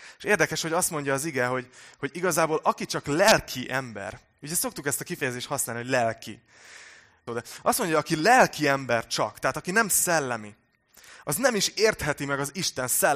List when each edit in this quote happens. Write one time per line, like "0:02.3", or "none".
0:07.3